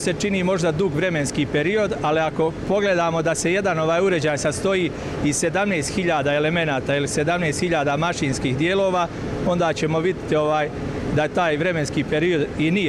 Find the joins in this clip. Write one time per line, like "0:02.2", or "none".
none